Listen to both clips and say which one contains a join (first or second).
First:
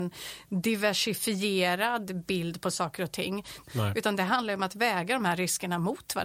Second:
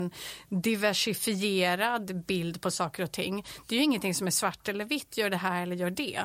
first